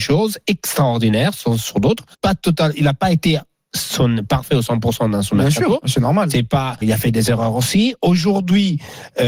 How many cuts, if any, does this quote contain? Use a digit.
2